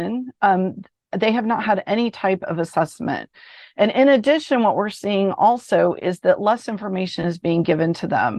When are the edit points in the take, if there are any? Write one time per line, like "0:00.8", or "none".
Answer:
none

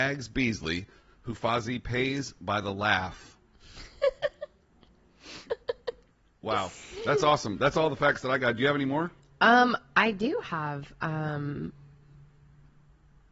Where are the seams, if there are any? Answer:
none

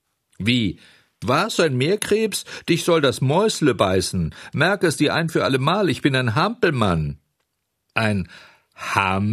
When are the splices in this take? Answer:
0:01.2

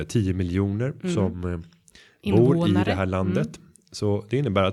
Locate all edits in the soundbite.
none

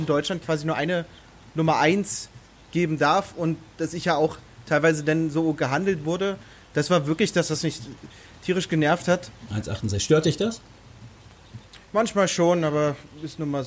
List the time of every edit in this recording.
0:09.5
0:11.8

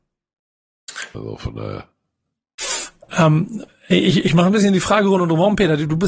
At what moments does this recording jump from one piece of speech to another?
0:01.1
0:03.7

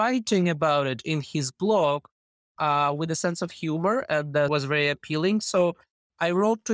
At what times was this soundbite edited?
0:04.5

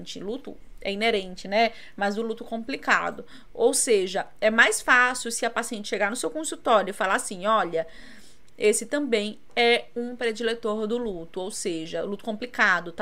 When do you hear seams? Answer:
0:08.5

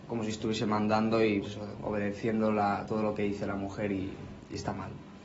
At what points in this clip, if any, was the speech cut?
0:01.4

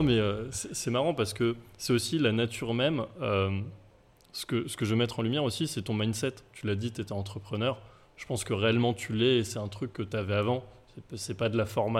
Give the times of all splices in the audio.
none

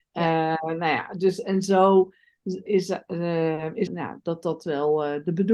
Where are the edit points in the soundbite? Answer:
0:02.7
0:03.9

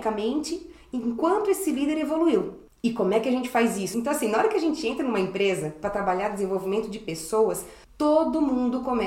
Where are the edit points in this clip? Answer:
0:03.9

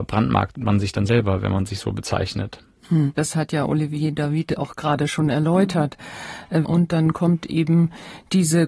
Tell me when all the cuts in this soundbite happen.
0:03.2
0:06.6

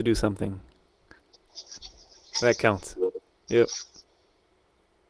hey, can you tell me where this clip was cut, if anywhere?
0:03.4

